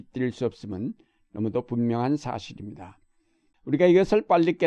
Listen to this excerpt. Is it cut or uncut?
cut